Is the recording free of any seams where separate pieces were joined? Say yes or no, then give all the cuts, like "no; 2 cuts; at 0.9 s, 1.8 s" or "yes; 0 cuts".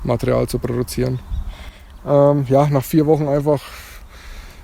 no; 1 cut; at 2.0 s